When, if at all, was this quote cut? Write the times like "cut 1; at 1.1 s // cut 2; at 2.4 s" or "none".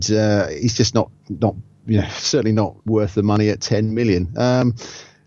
cut 1; at 2.8 s